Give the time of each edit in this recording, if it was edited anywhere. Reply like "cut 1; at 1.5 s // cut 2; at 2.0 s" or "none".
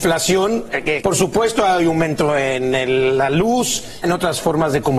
cut 1; at 1.0 s // cut 2; at 4.0 s

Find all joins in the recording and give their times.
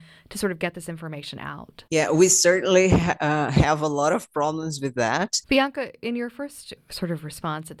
cut 1; at 1.9 s // cut 2; at 5.4 s // cut 3; at 6.8 s

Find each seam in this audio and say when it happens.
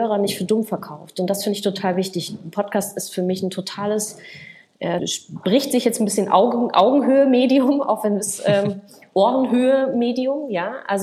cut 1; at 5.0 s

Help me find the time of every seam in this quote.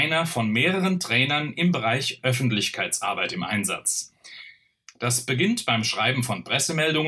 cut 1; at 4.9 s

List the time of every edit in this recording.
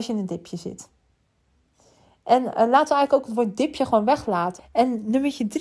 cut 1; at 4.6 s

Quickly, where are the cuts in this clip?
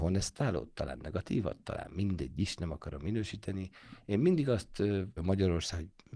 cut 1; at 5.2 s

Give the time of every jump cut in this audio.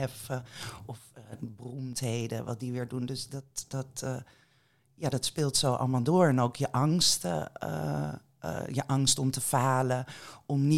none

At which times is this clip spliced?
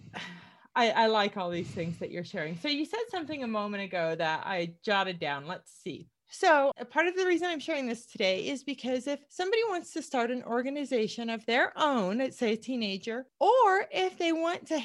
cut 1; at 6.1 s

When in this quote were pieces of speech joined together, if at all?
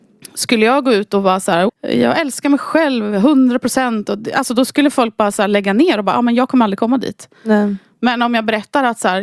cut 1; at 1.7 s

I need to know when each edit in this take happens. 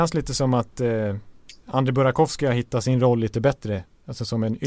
none

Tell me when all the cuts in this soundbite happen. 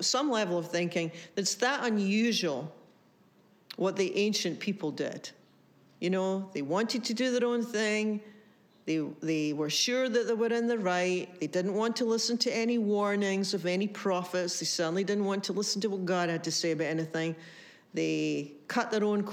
none

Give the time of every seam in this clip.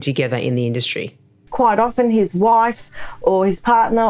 cut 1; at 1.5 s

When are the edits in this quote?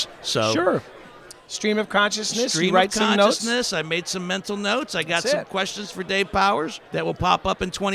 cut 1; at 6.8 s

